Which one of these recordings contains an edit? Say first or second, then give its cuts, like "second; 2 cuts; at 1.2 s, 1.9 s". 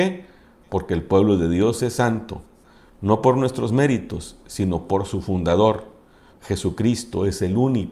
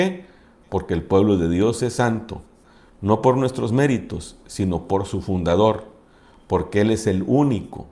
first; 1 cut; at 6.3 s